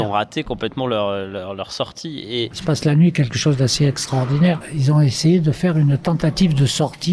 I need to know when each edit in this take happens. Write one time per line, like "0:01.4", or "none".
0:02.5